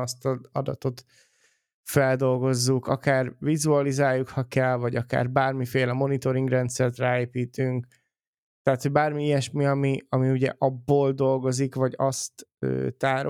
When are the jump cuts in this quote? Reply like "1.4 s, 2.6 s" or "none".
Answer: none